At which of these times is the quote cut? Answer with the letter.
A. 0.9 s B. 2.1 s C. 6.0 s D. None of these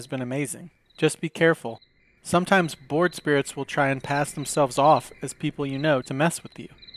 C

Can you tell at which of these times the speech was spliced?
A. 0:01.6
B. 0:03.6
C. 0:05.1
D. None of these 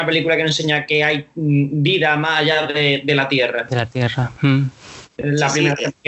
D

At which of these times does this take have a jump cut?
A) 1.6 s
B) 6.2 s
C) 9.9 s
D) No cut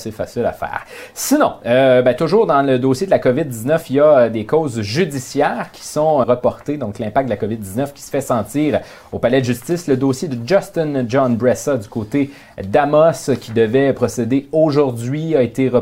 B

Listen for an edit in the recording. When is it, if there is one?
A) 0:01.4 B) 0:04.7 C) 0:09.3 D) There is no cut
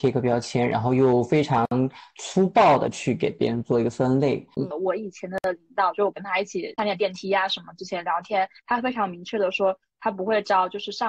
B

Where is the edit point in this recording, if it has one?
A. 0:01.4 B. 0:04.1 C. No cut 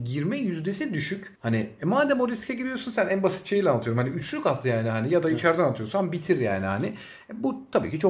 A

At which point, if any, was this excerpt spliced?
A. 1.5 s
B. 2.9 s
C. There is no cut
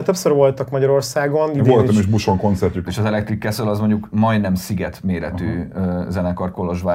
B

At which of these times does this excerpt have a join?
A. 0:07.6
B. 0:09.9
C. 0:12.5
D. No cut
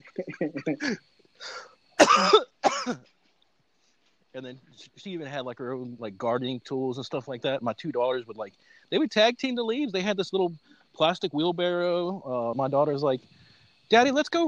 C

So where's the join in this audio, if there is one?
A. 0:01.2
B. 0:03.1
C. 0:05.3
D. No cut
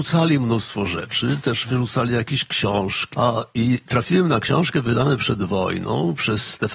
B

